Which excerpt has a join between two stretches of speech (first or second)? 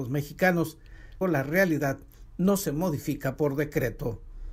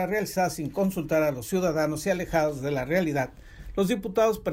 first